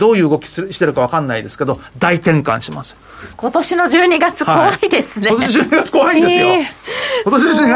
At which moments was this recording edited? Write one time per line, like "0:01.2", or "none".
0:03.3